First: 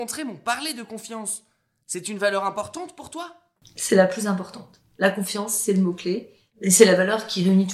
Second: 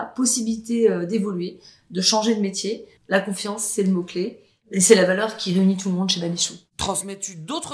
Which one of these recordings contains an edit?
second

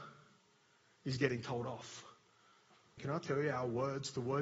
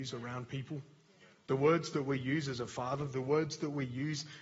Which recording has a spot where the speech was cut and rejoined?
first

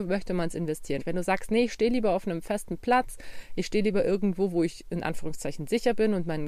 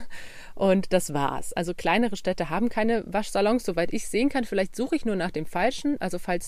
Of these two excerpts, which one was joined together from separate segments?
first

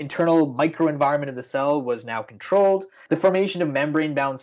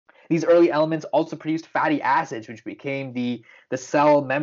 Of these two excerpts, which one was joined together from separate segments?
first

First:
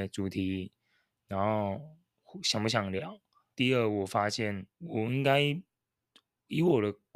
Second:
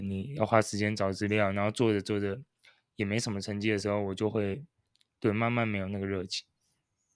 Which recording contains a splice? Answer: first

